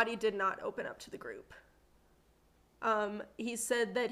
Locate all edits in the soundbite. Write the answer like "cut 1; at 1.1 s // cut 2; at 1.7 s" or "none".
none